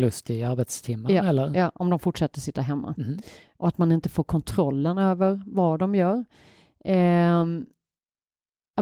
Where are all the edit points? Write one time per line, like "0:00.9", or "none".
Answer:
none